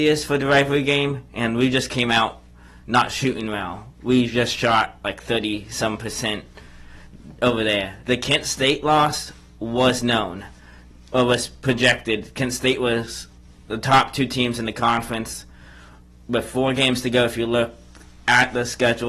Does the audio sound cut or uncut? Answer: uncut